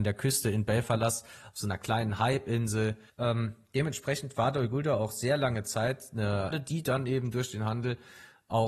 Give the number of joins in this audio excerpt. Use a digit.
2